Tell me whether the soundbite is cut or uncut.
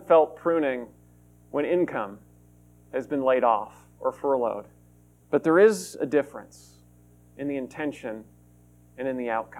cut